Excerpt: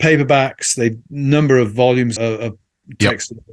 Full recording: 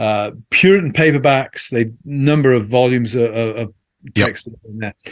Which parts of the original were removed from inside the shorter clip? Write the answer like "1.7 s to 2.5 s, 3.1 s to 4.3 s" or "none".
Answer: 3.1 s to 3.3 s